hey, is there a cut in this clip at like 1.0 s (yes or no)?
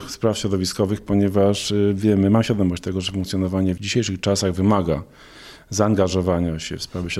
no